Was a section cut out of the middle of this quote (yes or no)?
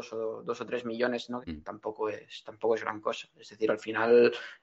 yes